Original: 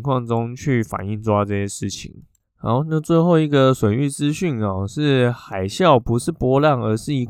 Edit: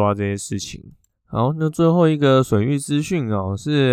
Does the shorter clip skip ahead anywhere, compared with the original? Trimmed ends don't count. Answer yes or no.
no